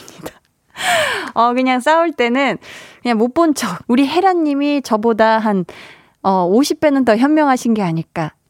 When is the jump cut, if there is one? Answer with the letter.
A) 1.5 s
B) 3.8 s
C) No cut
B